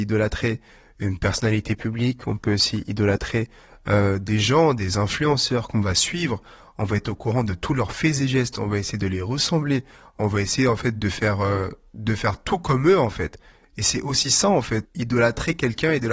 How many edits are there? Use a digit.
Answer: 1